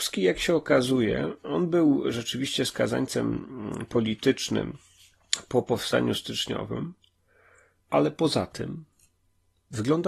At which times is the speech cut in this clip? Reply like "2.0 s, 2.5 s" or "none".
none